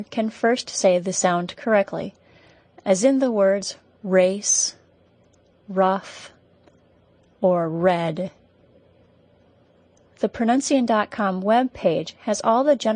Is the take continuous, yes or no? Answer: yes